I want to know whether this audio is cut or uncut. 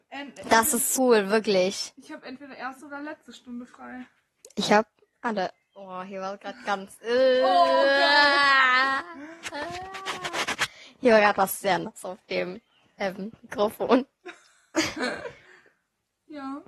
cut